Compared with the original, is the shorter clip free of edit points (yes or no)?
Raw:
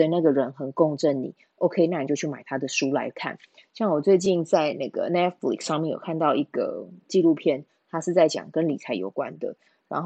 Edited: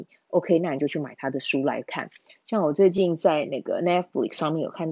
yes